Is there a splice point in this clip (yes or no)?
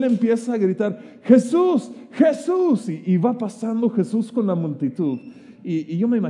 no